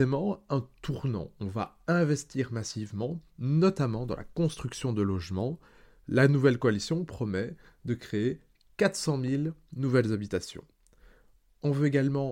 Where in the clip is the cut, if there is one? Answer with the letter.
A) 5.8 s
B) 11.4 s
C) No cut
C